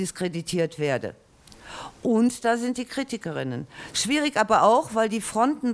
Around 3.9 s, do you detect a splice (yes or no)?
yes